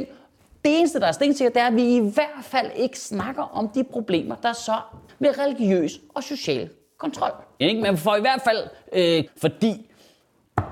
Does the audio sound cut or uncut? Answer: cut